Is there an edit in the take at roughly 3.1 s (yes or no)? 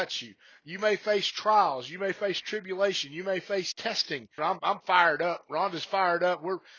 no